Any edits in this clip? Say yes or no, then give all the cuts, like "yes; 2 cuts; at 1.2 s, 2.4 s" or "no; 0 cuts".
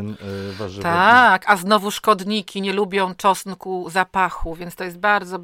no; 0 cuts